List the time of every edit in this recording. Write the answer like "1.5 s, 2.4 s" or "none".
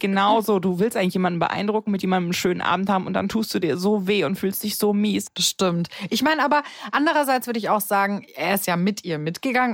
5.2 s